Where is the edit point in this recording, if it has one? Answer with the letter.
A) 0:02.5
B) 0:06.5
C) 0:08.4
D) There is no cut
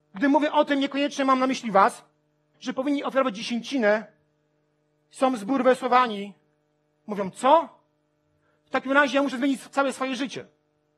A